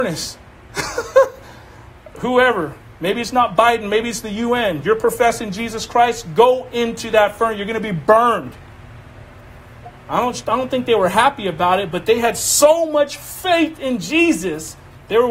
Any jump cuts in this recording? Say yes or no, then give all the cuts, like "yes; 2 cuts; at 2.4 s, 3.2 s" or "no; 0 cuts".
no; 0 cuts